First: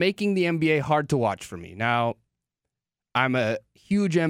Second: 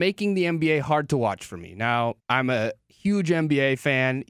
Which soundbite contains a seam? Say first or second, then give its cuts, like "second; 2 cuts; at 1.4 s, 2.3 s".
second; 1 cut; at 2.2 s